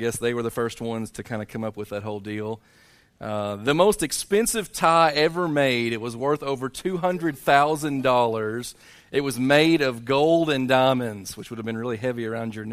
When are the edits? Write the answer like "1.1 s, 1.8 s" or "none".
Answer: none

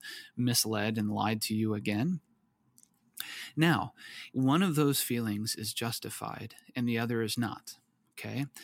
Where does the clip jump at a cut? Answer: 4.3 s

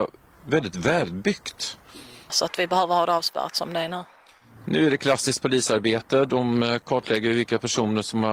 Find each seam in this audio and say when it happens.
2.3 s

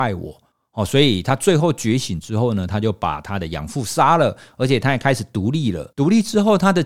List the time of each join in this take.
5.9 s

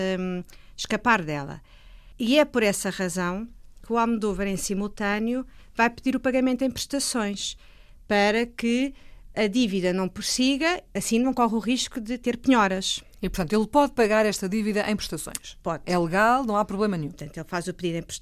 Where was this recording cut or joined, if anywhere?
17.1 s

